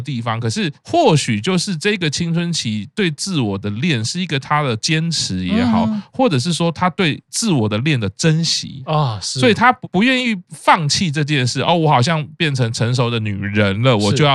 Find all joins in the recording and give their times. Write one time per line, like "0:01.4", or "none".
none